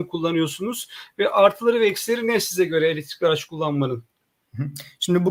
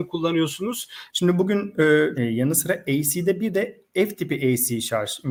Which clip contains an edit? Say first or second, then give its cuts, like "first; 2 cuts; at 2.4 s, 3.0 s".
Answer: second; 2 cuts; at 1.1 s, 2.2 s